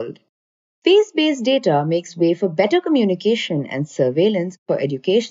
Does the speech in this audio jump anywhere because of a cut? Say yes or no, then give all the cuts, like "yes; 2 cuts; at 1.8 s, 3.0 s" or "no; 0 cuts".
no; 0 cuts